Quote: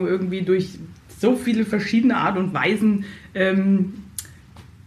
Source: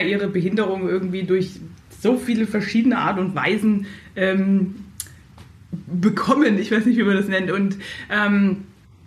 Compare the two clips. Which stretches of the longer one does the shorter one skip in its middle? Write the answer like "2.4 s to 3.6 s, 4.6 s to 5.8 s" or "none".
none